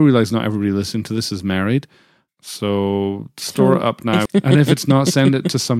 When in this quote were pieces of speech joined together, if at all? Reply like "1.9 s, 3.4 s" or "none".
2.3 s, 4.3 s